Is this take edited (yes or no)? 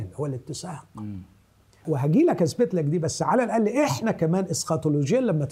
yes